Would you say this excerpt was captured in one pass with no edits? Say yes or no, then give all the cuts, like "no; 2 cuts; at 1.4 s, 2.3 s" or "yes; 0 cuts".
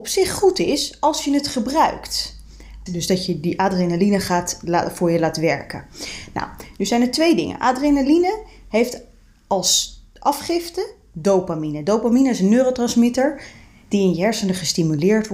no; 1 cut; at 2.9 s